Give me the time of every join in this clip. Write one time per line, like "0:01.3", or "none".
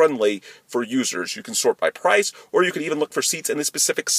none